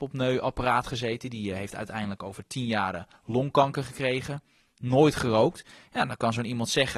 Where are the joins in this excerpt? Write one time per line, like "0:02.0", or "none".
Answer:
none